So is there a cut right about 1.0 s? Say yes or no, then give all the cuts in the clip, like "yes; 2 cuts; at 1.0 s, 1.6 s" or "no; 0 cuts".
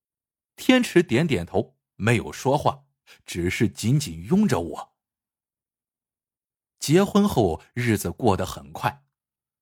no; 0 cuts